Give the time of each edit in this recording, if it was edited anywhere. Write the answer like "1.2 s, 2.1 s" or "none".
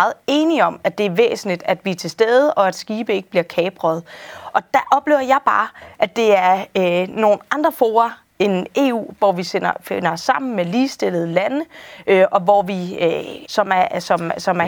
9.2 s, 13.4 s